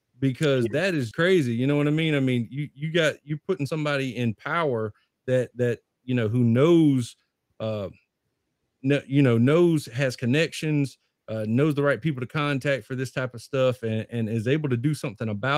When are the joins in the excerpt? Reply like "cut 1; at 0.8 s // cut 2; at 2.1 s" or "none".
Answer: cut 1; at 1.1 s